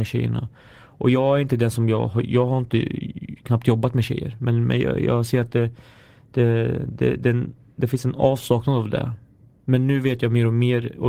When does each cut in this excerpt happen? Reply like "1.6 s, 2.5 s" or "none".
none